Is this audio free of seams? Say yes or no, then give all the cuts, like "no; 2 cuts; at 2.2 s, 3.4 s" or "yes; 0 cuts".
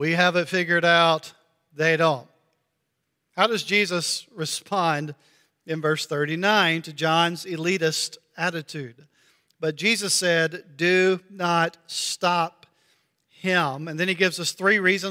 yes; 0 cuts